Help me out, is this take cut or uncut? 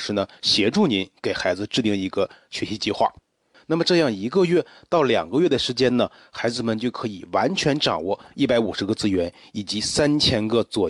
cut